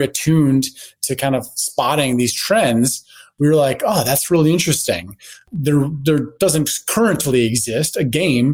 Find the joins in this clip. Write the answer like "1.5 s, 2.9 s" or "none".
none